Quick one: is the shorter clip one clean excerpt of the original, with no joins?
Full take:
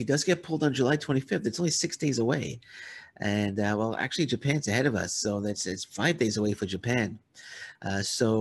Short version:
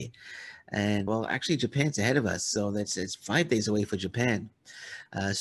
no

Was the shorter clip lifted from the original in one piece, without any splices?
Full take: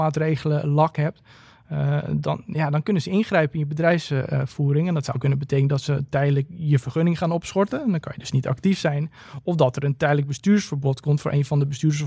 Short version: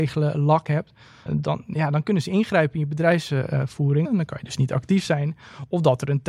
no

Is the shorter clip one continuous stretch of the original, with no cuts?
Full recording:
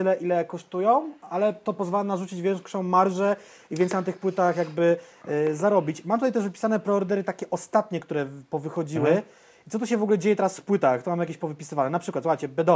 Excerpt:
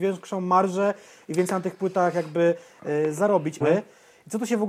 no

